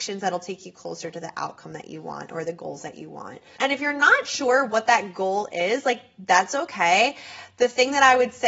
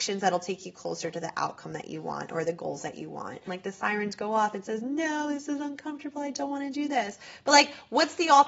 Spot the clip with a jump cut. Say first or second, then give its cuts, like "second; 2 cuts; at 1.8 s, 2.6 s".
second; 1 cut; at 3.5 s